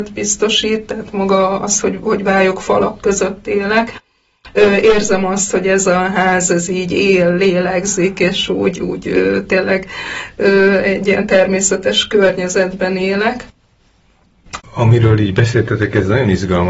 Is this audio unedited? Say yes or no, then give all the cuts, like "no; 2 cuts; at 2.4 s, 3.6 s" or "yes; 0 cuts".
no; 1 cut; at 14.6 s